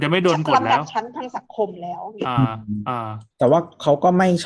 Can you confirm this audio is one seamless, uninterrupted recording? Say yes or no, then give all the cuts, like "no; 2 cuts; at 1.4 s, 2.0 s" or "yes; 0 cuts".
no; 1 cut; at 3.3 s